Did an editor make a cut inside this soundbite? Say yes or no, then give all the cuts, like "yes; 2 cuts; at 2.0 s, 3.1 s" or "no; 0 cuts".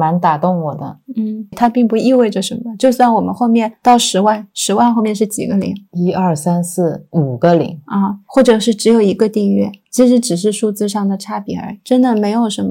yes; 1 cut; at 1.5 s